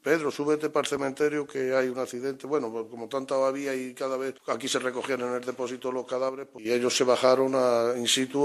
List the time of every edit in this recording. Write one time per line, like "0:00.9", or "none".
none